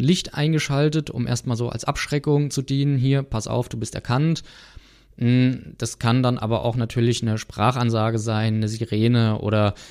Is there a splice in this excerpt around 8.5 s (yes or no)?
no